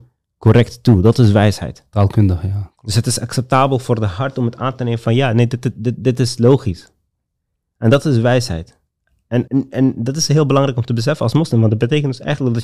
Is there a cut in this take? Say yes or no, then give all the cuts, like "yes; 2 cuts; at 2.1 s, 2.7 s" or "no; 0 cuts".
yes; 1 cut; at 9.5 s